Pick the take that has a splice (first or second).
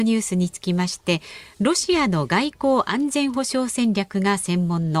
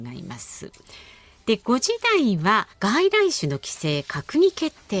second